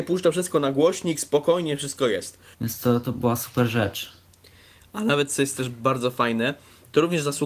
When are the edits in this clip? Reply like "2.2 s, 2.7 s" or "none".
2.5 s